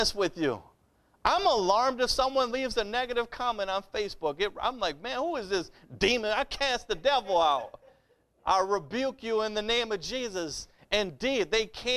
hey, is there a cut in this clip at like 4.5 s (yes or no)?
no